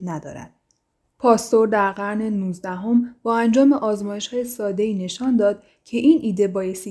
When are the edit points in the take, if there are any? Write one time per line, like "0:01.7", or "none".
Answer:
0:01.1